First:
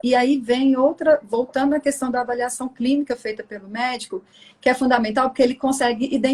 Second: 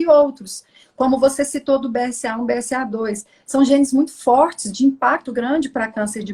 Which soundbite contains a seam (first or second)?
second